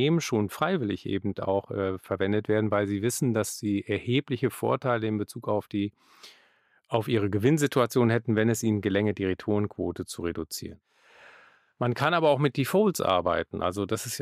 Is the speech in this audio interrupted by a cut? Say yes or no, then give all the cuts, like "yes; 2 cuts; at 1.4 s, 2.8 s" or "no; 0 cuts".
no; 0 cuts